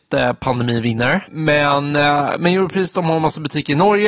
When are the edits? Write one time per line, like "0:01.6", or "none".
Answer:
0:01.3